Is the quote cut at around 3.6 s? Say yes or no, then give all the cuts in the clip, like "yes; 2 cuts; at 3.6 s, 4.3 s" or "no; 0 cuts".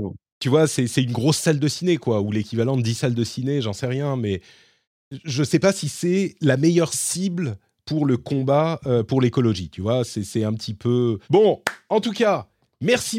no; 1 cut; at 11.2 s